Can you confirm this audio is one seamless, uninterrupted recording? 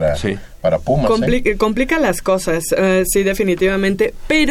yes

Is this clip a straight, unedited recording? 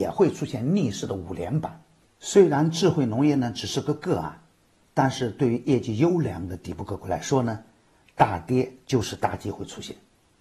no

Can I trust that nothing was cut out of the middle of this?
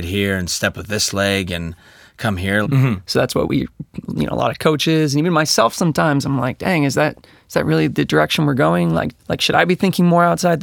no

